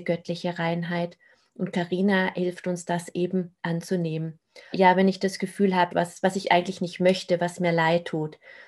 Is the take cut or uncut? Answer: cut